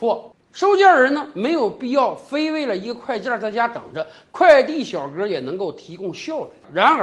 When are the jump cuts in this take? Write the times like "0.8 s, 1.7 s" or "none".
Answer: none